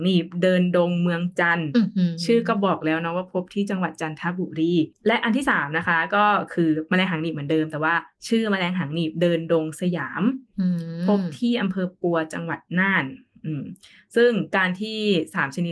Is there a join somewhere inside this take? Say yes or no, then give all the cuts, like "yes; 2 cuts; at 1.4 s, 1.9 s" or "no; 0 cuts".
no; 0 cuts